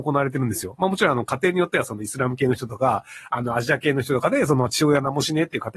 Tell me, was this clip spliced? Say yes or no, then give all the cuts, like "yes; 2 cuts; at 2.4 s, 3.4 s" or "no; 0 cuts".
no; 0 cuts